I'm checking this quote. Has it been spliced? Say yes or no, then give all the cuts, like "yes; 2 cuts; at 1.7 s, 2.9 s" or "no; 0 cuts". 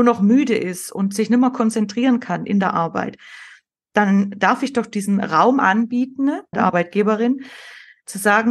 yes; 1 cut; at 6.5 s